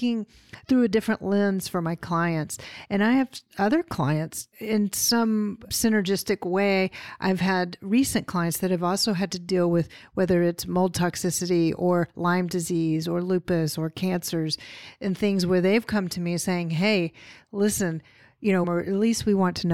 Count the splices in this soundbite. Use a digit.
1